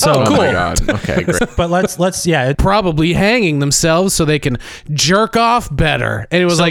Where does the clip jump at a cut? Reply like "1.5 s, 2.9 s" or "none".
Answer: 1.4 s, 2.5 s